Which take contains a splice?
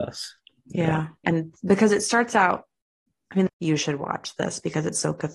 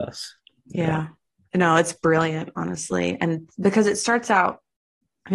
first; 2 cuts; at 1.2 s, 3.5 s

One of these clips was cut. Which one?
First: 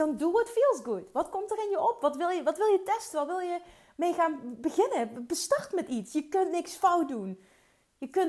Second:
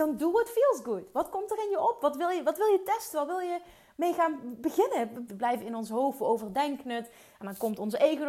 second; 1 cut; at 5.3 s

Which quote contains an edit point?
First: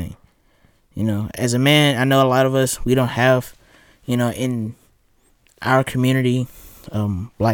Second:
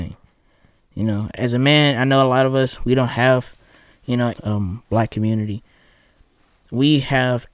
second; 1 cut; at 4.3 s

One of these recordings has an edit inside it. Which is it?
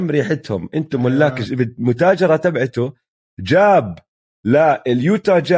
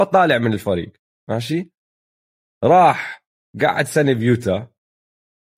first; 1 cut; at 1.5 s

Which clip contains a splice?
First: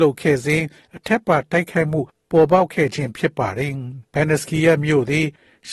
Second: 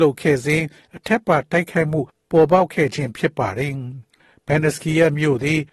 first; 1 cut; at 4.1 s

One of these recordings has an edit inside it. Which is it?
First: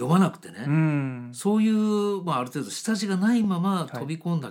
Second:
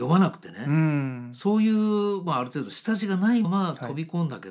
second; 1 cut; at 3.4 s

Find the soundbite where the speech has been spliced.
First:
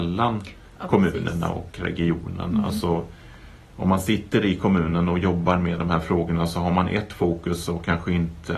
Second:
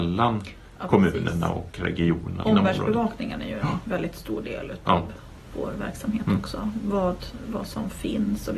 second; 1 cut; at 2.4 s

